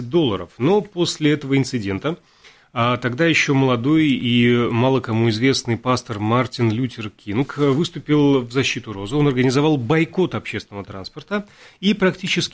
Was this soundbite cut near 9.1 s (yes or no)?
no